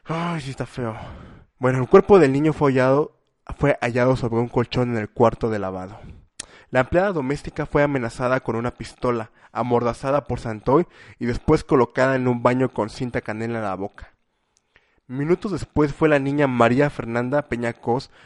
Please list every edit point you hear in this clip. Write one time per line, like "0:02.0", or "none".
none